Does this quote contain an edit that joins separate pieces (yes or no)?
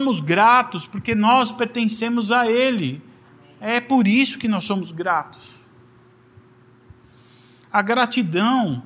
no